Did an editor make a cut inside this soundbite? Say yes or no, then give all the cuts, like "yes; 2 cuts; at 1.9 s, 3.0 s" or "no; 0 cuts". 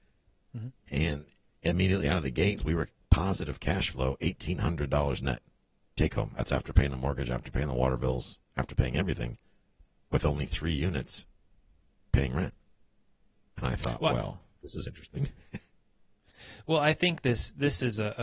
yes; 1 cut; at 2.6 s